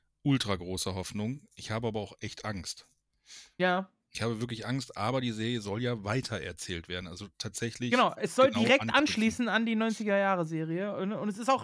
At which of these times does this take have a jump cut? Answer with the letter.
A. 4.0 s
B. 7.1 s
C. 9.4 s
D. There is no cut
D